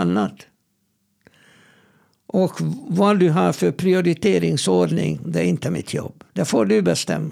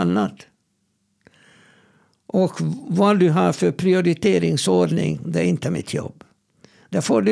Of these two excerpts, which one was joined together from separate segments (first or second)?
first